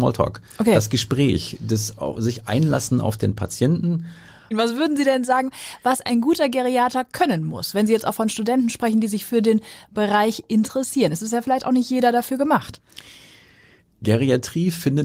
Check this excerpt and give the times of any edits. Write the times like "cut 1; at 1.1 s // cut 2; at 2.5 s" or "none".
cut 1; at 4.5 s